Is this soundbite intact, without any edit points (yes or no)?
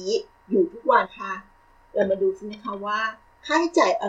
no